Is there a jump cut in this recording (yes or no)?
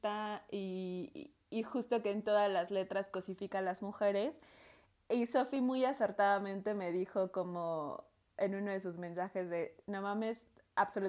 no